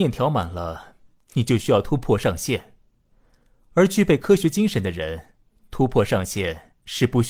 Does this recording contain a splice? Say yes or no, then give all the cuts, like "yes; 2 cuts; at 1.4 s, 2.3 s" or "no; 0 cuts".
no; 0 cuts